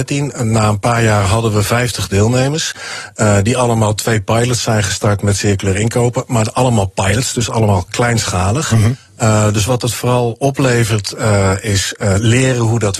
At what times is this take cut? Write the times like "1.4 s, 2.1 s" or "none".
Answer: none

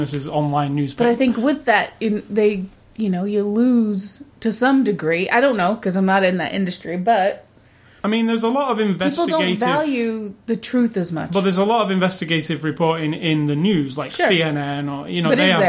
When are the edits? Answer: 4.3 s

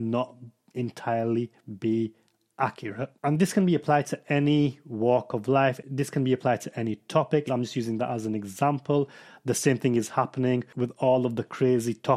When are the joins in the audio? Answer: 7.5 s

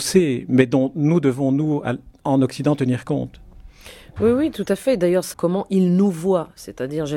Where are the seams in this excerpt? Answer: 5.3 s

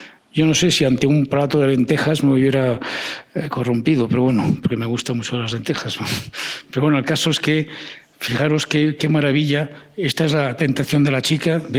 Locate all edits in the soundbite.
none

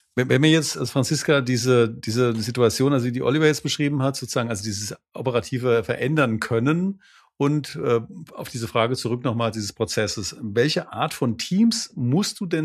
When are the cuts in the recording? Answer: none

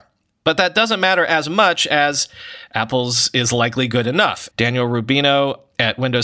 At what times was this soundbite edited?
4.5 s

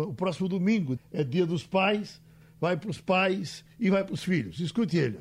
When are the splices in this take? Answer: 1.0 s, 2.4 s

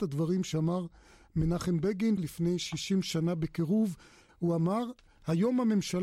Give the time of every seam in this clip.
2.2 s, 4.3 s

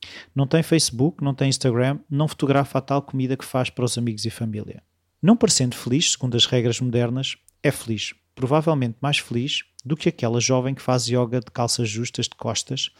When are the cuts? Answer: none

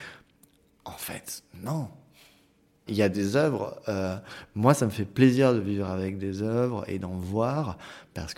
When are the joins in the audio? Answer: 2.9 s

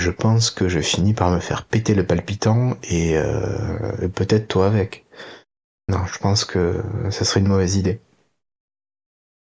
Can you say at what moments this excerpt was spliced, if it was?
none

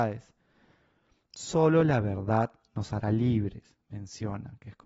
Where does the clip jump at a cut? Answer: none

